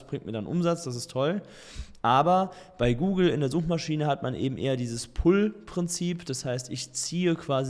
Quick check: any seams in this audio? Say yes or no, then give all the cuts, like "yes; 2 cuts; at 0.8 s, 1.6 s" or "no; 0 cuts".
no; 0 cuts